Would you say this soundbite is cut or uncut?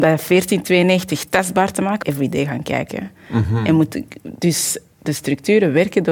cut